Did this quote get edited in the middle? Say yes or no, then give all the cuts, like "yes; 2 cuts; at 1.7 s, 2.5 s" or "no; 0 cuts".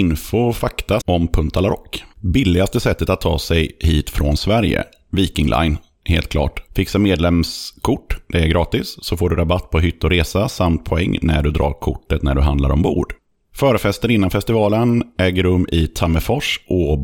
yes; 1 cut; at 1.0 s